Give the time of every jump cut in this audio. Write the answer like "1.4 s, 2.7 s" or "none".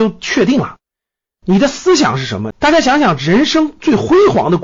2.5 s